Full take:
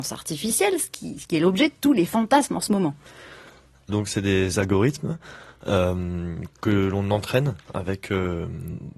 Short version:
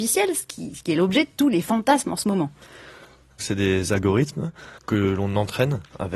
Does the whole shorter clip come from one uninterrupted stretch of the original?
no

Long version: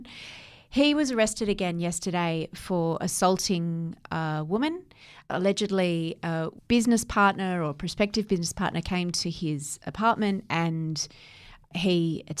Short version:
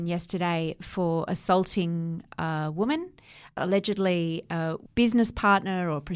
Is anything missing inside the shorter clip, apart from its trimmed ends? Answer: no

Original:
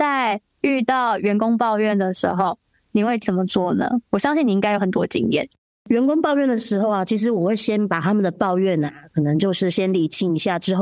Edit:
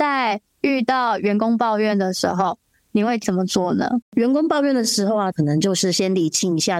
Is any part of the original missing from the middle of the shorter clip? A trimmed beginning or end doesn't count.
yes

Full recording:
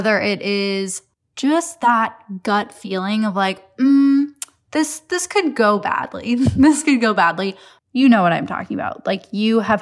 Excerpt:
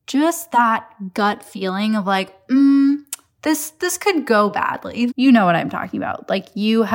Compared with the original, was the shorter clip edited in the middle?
yes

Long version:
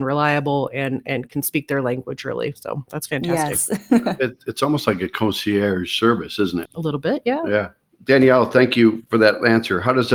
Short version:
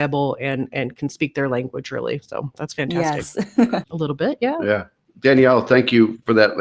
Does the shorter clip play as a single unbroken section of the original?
no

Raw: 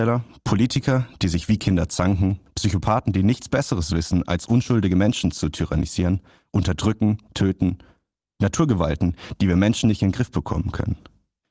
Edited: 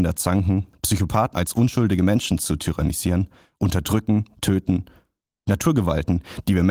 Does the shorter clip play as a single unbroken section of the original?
no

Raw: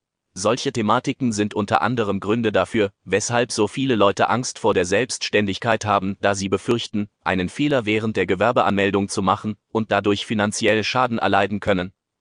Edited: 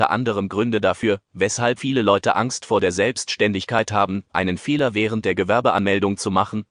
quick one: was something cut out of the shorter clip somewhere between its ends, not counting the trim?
yes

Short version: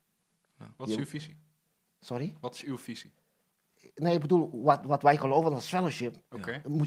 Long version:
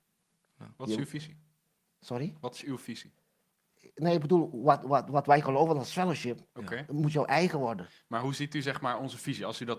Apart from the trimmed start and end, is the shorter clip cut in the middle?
yes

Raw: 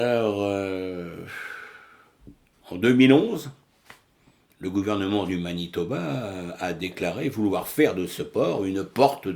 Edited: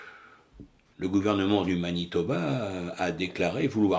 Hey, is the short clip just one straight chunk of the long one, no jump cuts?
no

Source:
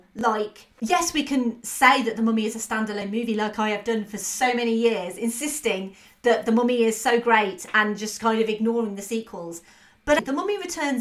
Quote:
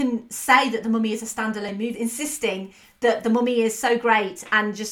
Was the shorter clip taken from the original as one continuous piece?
no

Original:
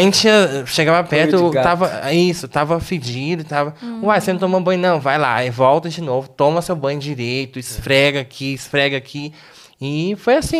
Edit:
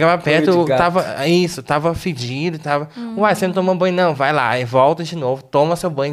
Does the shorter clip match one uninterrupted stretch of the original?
yes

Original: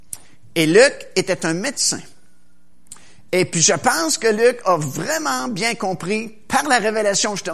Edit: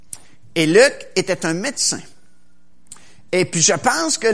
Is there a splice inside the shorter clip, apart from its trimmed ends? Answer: no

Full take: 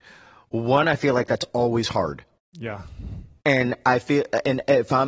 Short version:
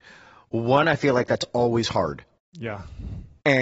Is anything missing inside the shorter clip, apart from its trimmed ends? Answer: no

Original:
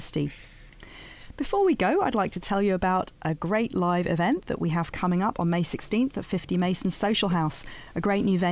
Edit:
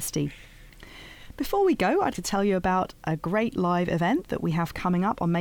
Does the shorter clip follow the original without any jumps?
no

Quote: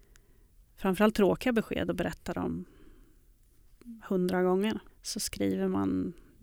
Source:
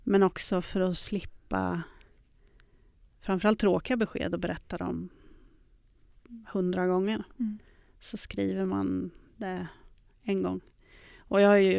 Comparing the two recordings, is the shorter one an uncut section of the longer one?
no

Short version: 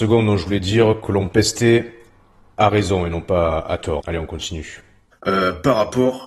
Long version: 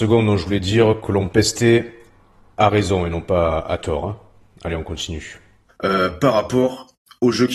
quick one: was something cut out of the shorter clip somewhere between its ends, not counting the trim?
yes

